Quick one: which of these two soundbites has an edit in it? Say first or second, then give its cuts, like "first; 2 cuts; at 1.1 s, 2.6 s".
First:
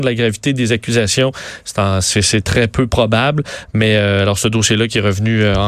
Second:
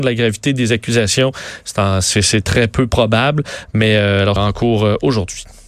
second; 1 cut; at 4.4 s